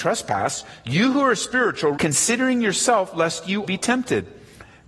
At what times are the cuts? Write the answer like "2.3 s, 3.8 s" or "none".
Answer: 1.9 s, 3.6 s